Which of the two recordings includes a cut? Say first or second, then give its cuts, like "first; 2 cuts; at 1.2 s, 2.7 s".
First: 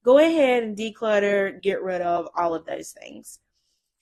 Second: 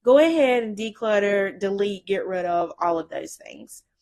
first; 1 cut; at 1.6 s